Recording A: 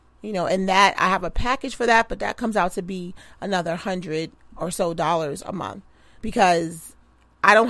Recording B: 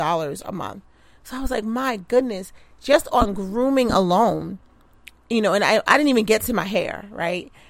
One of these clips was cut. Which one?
A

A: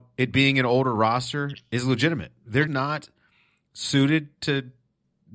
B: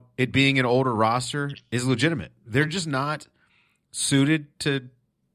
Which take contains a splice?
A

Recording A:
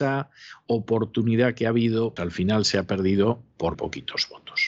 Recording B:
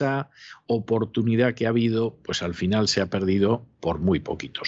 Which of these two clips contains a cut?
A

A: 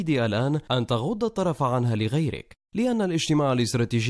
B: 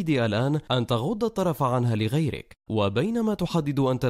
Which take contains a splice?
B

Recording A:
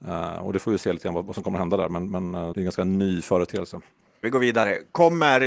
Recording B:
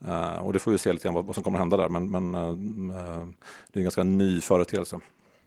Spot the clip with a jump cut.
A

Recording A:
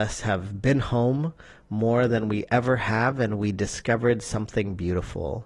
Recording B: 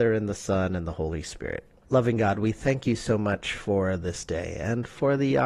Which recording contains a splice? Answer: B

